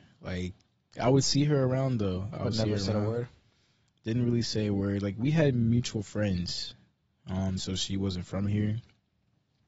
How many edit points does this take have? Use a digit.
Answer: 1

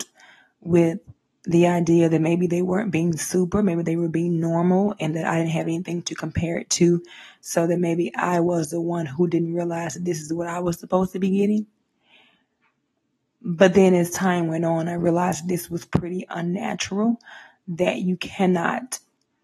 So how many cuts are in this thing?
0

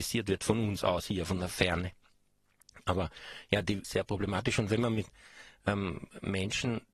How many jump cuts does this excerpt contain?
1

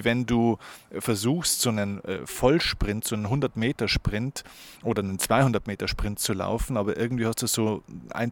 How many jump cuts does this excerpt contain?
0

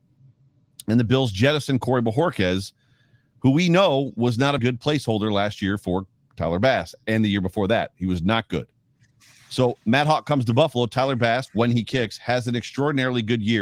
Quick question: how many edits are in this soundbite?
1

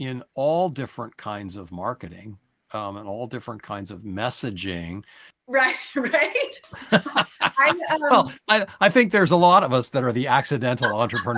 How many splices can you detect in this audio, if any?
2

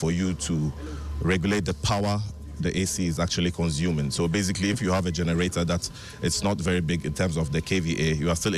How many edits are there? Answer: 1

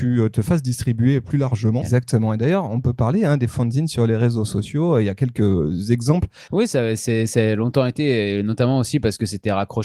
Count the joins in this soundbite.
2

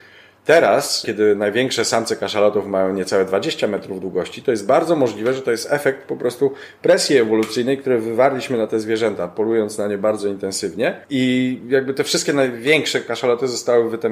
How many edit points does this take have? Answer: 0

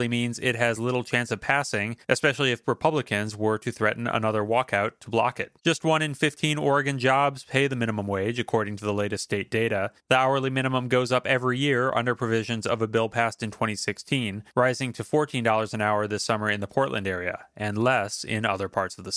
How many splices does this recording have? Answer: 0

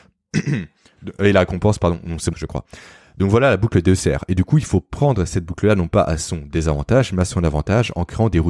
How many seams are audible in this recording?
1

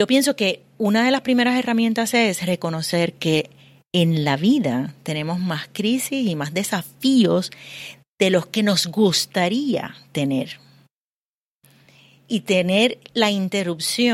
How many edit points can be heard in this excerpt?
0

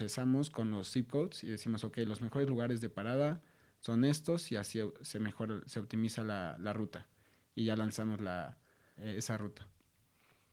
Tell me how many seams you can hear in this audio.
1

